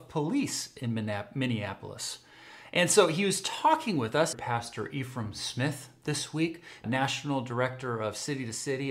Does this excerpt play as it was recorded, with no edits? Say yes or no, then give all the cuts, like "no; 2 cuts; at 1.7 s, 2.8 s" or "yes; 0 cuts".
no; 2 cuts; at 4.3 s, 6.8 s